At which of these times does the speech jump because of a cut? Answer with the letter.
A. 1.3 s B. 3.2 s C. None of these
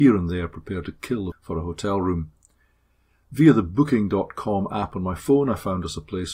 A